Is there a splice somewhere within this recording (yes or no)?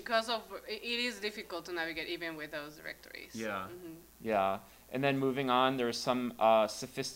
no